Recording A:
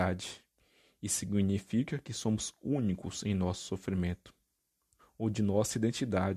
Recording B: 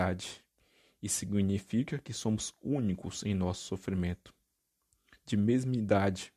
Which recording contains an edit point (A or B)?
A